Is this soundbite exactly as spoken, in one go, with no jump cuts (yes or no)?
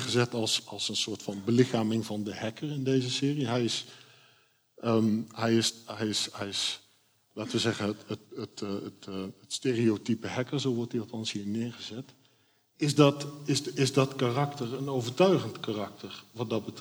yes